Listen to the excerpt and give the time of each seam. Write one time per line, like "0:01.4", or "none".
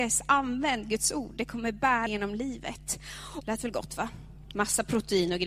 0:02.1
0:03.4